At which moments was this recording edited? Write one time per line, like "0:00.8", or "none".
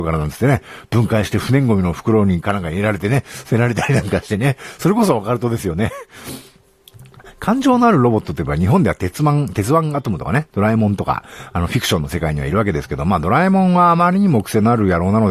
none